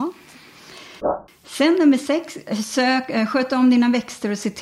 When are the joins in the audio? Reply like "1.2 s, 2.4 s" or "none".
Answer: none